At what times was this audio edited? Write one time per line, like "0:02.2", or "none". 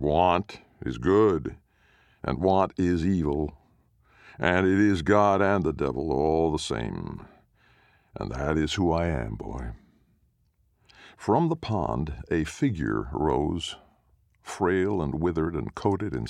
none